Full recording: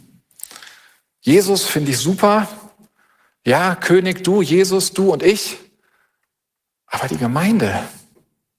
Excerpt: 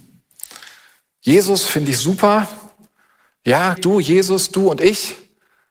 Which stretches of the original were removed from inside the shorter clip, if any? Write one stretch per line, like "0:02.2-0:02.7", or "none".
0:03.8-0:04.2